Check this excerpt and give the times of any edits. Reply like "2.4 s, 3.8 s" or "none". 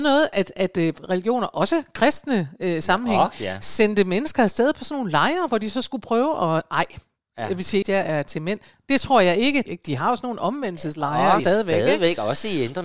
7.8 s, 9.7 s, 11.4 s